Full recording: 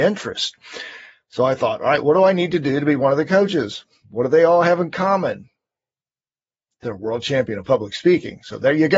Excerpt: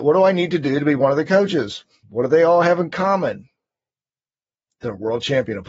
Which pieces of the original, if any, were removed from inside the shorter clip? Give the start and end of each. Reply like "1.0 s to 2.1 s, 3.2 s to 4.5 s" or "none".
none